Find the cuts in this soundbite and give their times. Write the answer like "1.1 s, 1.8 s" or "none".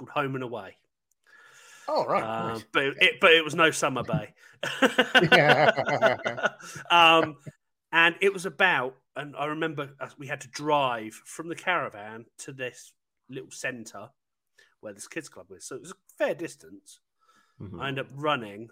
none